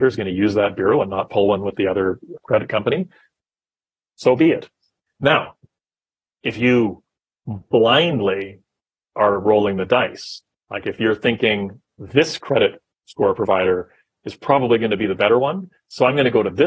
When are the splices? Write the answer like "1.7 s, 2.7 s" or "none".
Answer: 2.4 s, 5.1 s